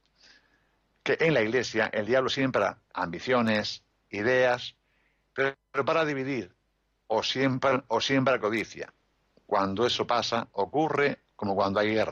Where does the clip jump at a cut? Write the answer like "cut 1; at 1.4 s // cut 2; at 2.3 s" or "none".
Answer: cut 1; at 2.9 s

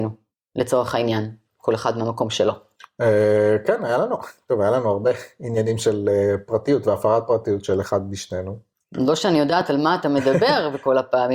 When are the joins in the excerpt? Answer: none

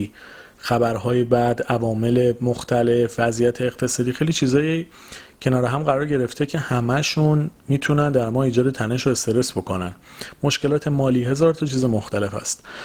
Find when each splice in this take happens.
cut 1; at 7.6 s

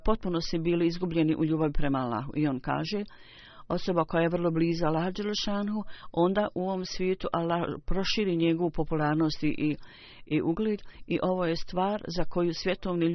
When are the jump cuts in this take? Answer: none

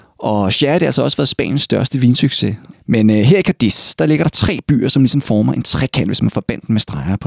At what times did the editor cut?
cut 1; at 2.7 s

